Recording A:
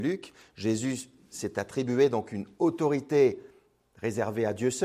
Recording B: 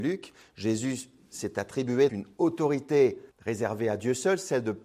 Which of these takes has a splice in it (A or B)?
B